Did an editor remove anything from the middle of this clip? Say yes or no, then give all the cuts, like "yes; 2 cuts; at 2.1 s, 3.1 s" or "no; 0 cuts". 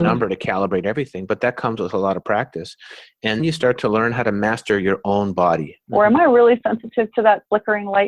yes; 2 cuts; at 3.4 s, 5.9 s